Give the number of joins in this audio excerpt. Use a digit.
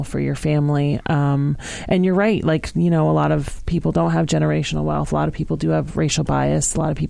0